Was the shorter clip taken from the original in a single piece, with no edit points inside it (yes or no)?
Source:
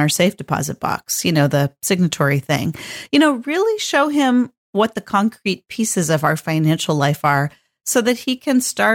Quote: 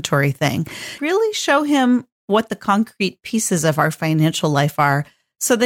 no